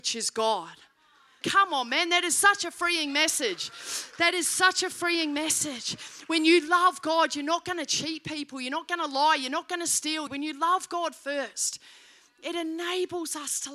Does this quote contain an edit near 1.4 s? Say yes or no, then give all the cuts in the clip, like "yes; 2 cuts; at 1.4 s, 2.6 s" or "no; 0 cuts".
yes; 2 cuts; at 1.4 s, 10.3 s